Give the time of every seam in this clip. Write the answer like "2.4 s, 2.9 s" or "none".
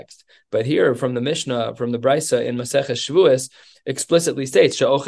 3.7 s